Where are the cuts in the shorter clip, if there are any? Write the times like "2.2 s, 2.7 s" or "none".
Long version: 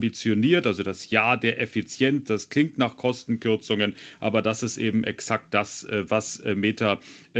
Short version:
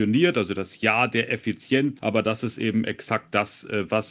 2.0 s

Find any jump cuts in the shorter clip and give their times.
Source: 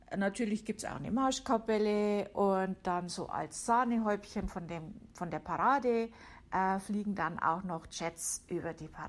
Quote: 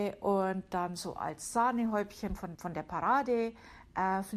2.6 s

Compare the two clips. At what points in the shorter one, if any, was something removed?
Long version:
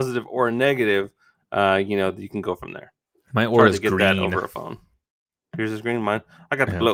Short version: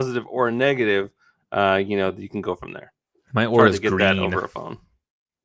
none

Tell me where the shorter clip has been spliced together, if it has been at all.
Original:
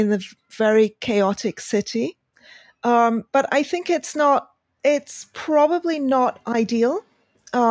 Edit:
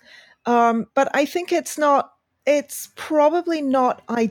none

